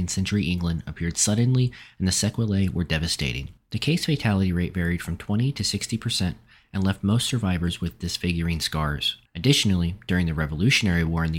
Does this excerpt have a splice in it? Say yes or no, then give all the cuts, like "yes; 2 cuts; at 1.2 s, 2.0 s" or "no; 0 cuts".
yes; 1 cut; at 9.3 s